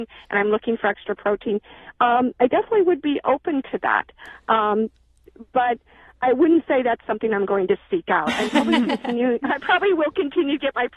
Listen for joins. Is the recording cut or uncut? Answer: uncut